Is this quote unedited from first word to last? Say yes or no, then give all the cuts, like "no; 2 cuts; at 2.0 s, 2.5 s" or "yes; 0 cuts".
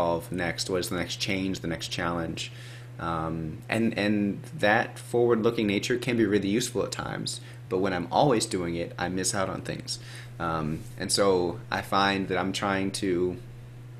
yes; 0 cuts